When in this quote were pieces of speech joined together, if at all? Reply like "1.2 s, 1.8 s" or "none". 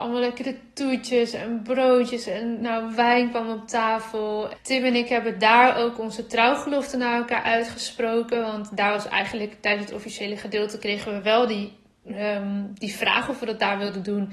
4.5 s